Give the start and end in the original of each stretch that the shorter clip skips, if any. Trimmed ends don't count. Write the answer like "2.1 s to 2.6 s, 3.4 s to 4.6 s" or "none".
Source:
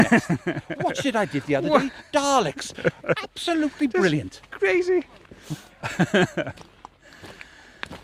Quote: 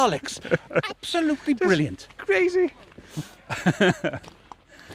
none